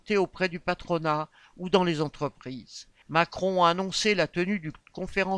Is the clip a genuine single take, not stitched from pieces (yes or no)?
no